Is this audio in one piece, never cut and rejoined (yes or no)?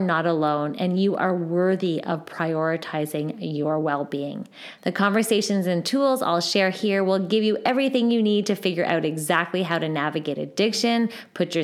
no